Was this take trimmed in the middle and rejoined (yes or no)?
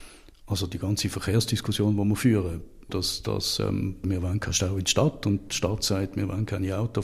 yes